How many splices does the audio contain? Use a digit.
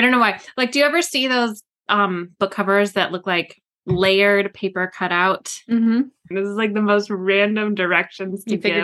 1